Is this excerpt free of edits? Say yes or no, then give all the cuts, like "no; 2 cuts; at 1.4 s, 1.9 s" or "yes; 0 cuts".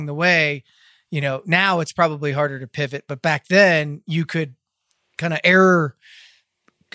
yes; 0 cuts